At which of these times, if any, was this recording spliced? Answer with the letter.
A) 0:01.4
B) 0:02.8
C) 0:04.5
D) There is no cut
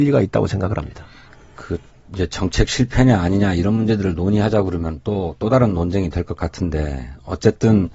D